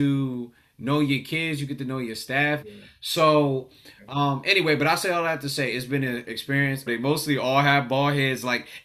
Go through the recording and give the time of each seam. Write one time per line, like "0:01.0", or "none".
0:02.6
0:06.9